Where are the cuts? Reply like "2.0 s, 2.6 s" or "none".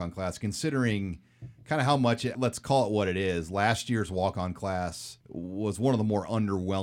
2.3 s, 5.2 s